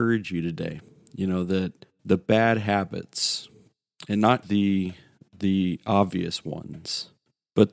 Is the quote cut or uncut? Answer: cut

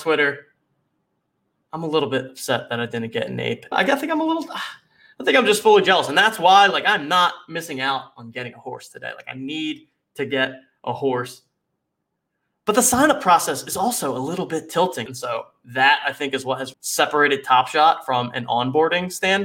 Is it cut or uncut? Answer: cut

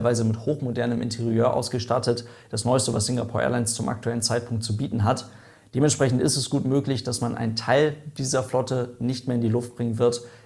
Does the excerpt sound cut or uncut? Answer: uncut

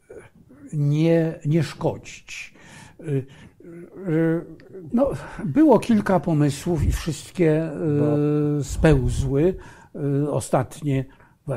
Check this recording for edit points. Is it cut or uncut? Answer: cut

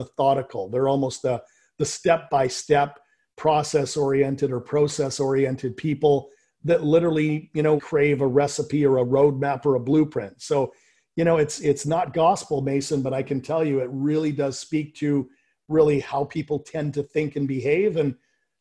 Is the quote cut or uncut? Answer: cut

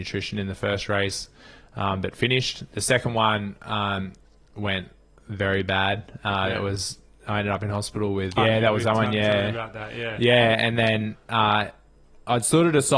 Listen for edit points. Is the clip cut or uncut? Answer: cut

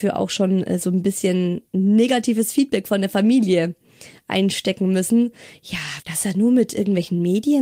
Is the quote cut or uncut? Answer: cut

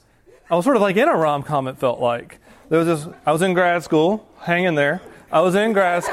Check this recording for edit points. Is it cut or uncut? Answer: uncut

